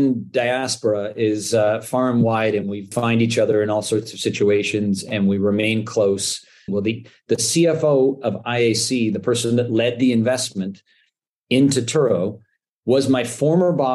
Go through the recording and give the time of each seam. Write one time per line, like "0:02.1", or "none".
0:06.7